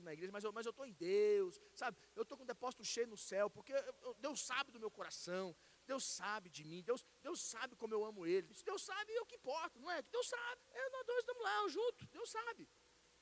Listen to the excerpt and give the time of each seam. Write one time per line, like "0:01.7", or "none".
0:08.5
0:10.6